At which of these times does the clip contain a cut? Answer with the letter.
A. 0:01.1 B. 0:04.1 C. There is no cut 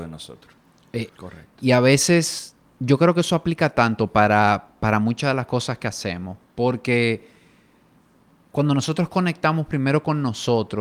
A